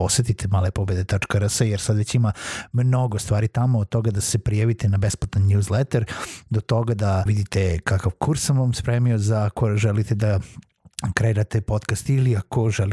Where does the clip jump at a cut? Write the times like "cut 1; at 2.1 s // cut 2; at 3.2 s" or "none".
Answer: cut 1; at 7.3 s

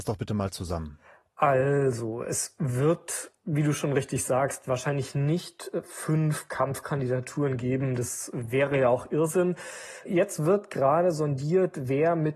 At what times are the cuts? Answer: none

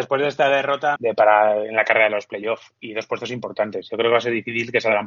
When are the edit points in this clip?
cut 1; at 1.0 s

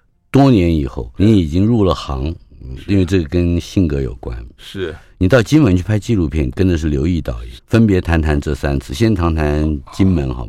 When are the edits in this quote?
cut 1; at 1.2 s // cut 2; at 4.6 s // cut 3; at 7.6 s

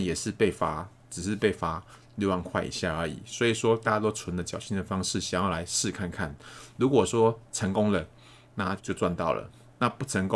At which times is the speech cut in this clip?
cut 1; at 8.8 s

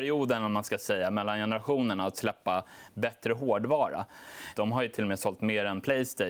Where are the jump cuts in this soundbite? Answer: cut 1; at 4.5 s

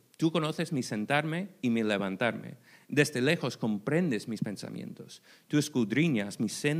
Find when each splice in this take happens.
none

